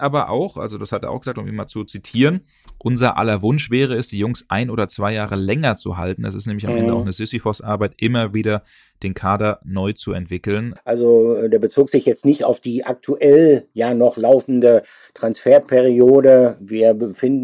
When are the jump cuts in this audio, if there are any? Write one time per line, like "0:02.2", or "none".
0:10.8